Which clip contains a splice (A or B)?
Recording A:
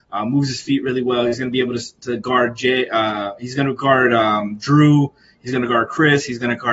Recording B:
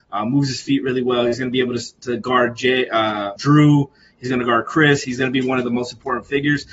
B